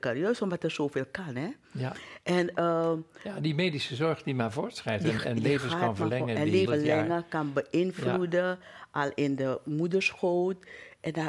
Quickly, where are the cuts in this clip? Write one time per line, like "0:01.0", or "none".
0:06.7